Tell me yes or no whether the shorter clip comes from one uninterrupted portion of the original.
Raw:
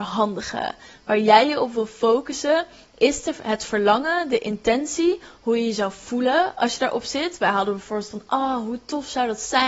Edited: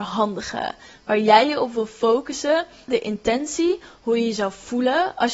no